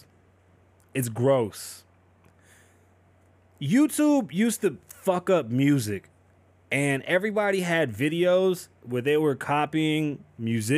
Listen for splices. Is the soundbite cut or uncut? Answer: uncut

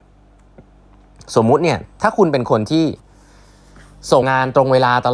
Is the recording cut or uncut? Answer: cut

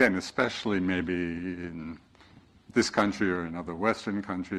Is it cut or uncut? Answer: uncut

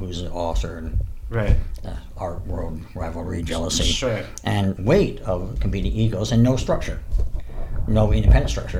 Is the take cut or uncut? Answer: cut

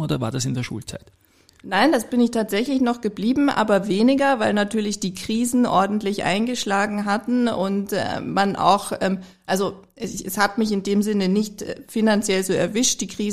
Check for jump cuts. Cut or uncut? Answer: uncut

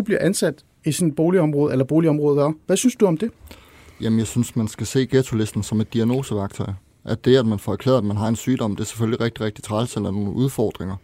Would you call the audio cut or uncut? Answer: uncut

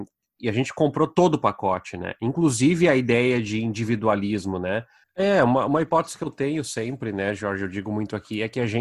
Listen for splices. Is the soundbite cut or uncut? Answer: cut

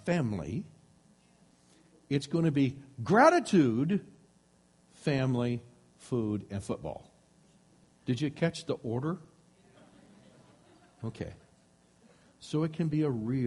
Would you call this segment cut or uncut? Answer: uncut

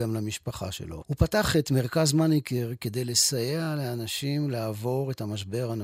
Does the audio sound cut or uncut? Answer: cut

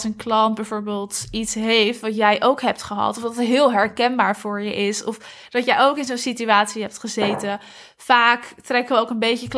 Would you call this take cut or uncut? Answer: uncut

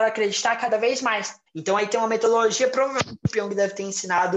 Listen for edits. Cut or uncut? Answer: cut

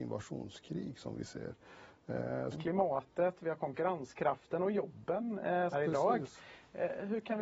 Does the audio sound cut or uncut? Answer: cut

